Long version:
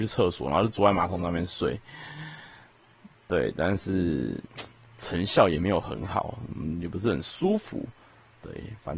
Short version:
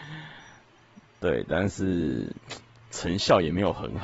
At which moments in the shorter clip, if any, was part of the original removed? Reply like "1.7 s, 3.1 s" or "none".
none